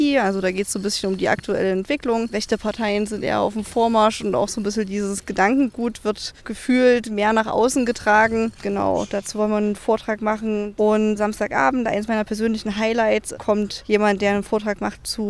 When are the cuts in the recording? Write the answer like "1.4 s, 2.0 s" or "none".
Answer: none